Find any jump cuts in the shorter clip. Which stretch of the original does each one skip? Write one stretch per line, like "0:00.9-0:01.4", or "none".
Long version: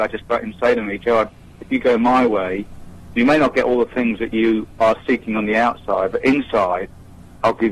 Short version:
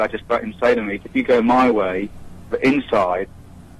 0:01.0-0:01.6
0:03.1-0:06.1